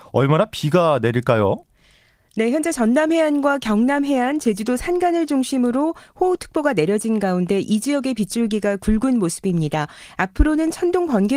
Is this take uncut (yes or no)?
yes